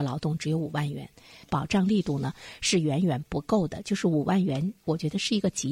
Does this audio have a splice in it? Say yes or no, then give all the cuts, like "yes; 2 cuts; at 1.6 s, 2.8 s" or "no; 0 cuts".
no; 0 cuts